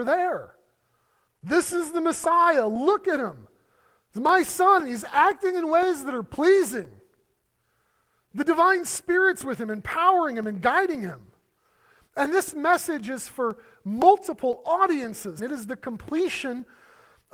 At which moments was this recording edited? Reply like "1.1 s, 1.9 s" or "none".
1.3 s, 15.4 s

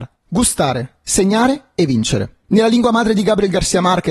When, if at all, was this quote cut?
none

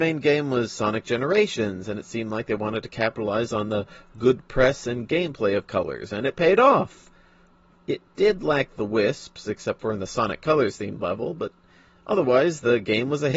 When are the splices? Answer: none

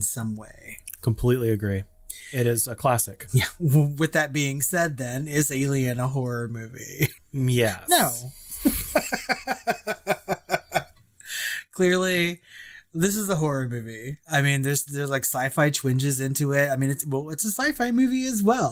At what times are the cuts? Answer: 7.2 s

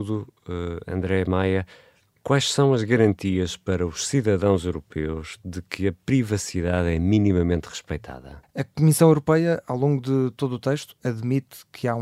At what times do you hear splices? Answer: 8.4 s

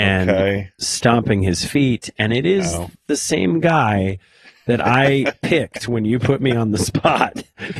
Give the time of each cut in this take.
none

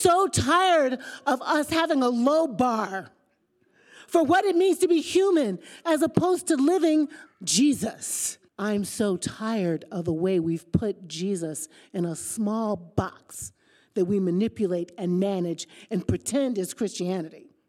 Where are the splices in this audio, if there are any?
7.3 s, 8.5 s

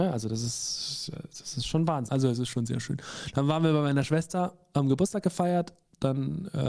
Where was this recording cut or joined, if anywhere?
2.1 s

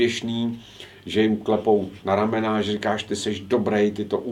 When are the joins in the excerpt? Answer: none

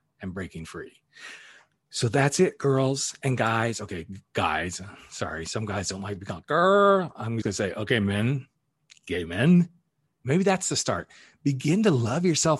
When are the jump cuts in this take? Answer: 7.4 s, 10.1 s

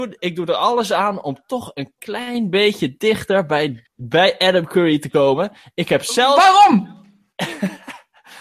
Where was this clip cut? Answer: 3.9 s

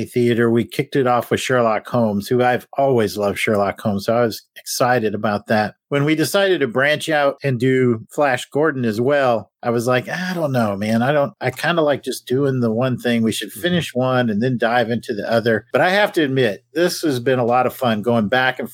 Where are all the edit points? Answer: none

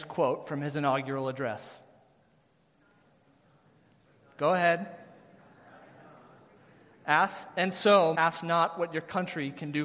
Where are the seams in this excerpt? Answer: 8.1 s

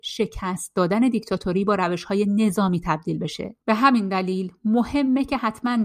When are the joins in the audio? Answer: 3.6 s

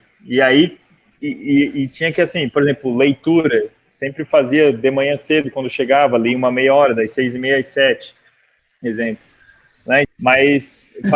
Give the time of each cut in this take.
10.0 s

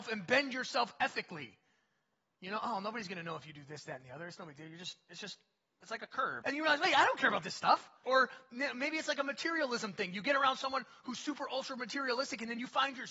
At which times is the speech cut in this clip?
6.4 s, 8.0 s

